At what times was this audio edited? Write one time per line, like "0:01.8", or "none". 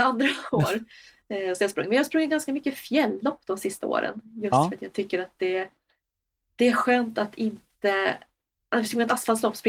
none

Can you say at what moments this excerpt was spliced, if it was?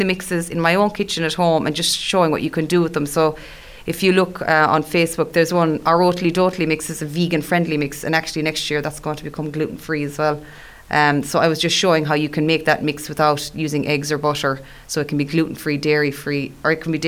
none

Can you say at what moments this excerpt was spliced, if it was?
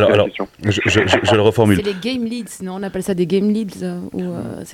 none

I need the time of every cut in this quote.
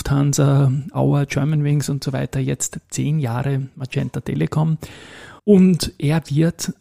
0:05.4

